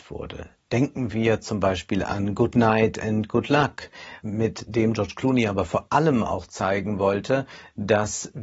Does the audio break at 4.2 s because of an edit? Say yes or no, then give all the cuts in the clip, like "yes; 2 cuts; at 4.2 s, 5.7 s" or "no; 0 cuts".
yes; 1 cut; at 4.2 s